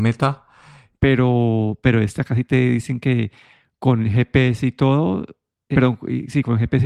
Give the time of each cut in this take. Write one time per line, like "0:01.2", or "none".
0:01.0
0:05.7